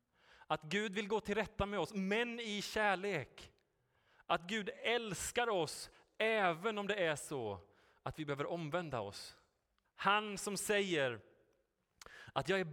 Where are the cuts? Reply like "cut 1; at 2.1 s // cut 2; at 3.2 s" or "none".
cut 1; at 9.8 s